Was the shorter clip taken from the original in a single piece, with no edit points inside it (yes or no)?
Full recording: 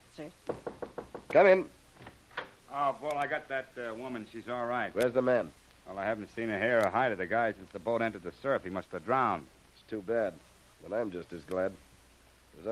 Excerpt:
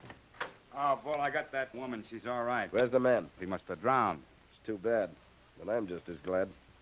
no